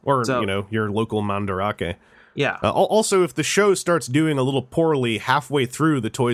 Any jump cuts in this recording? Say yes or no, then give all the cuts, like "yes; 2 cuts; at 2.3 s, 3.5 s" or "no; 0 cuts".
no; 0 cuts